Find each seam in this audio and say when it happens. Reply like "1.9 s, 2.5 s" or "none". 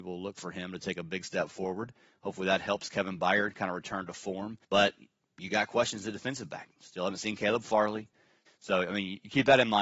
4.6 s, 8.5 s